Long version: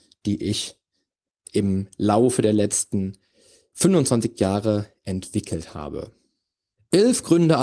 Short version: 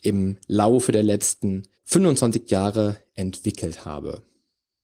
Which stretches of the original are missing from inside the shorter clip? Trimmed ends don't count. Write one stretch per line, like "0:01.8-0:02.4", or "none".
0:03.3-0:03.7